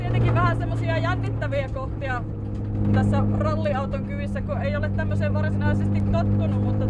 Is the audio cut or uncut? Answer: uncut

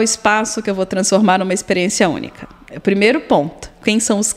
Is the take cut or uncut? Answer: uncut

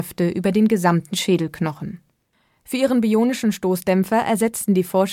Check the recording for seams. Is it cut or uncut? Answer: uncut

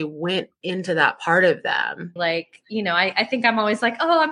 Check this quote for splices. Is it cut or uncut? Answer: cut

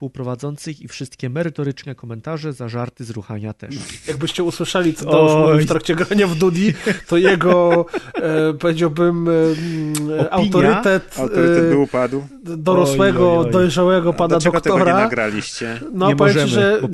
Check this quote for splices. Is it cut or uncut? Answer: uncut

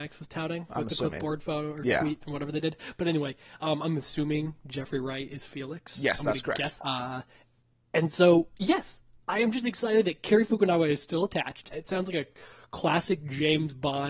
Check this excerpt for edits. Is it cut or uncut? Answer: cut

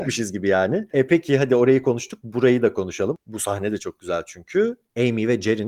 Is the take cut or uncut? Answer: uncut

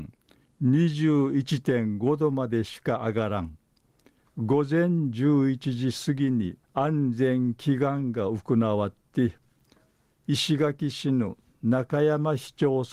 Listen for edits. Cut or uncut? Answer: cut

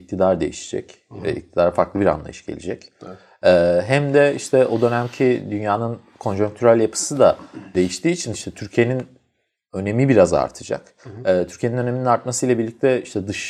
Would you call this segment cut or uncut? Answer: uncut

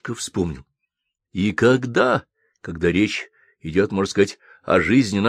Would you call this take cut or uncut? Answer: uncut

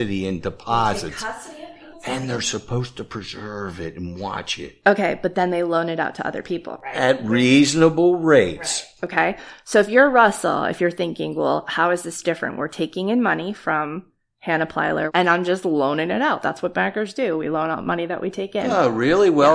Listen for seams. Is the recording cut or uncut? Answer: uncut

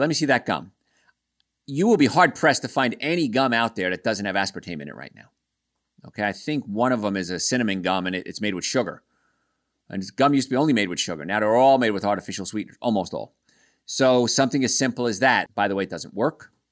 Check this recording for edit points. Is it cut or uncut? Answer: cut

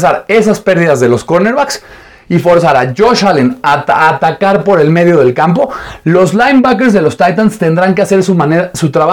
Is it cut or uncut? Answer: uncut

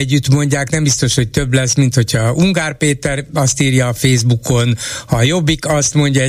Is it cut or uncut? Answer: uncut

